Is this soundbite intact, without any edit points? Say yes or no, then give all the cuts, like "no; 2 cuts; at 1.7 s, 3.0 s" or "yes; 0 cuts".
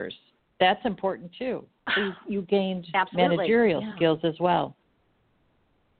yes; 0 cuts